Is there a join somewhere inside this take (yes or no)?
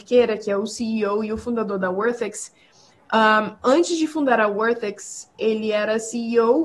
no